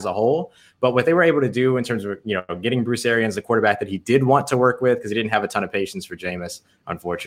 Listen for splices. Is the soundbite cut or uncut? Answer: uncut